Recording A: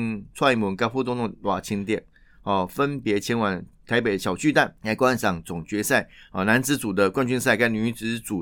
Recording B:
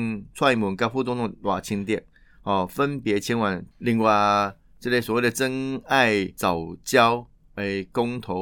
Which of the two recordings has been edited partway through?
B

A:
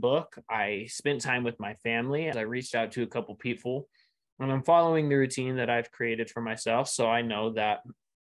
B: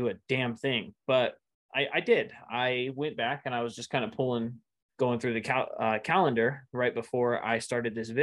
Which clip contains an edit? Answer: A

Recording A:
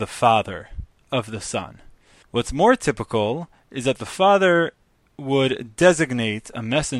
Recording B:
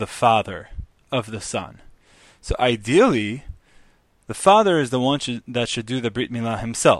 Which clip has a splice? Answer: A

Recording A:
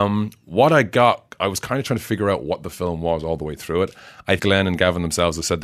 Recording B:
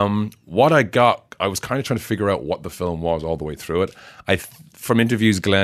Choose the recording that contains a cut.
A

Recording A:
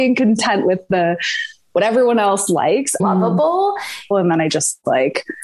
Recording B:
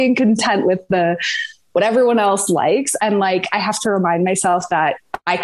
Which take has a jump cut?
A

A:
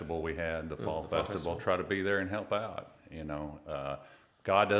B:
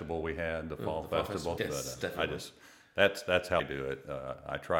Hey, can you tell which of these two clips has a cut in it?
B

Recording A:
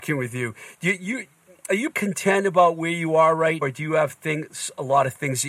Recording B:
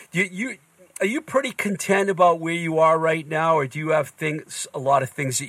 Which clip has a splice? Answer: A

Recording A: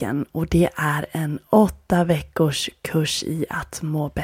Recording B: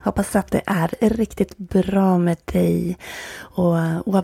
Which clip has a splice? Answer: B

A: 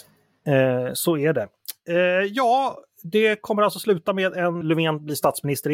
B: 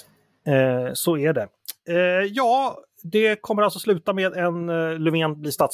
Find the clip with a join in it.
A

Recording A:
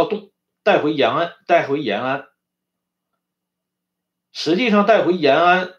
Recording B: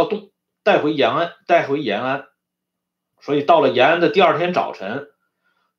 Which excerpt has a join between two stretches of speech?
B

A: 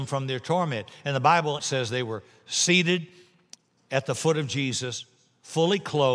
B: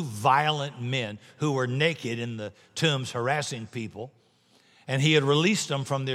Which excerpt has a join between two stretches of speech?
A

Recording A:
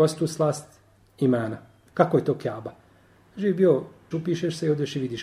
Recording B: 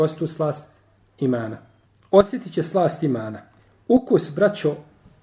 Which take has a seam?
A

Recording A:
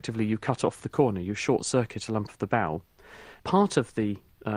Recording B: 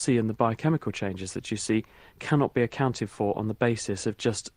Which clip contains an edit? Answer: A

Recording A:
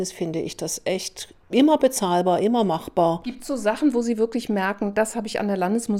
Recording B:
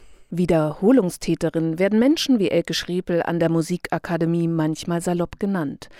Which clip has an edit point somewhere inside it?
A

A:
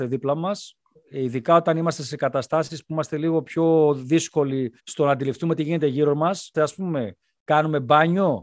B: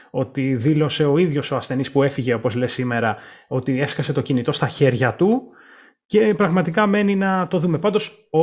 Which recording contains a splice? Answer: A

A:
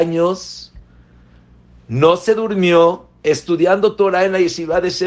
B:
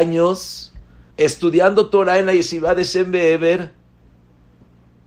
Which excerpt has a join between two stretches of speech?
B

